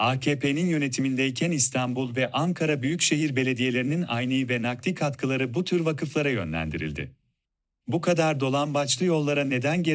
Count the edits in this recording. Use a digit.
1